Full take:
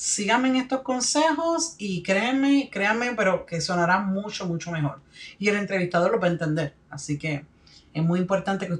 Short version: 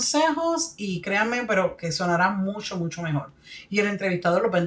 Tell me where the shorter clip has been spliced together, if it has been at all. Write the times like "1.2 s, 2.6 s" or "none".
1.0 s